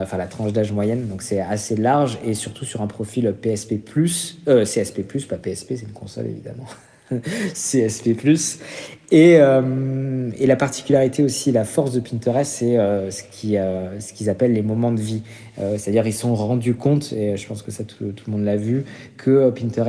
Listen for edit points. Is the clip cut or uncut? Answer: uncut